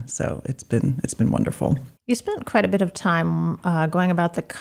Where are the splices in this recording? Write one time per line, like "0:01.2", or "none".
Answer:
0:02.0